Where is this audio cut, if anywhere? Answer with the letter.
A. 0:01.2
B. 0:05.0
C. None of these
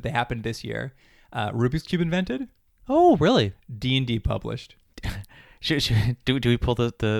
B